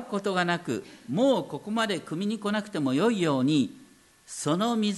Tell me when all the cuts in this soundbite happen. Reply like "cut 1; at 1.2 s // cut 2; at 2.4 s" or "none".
none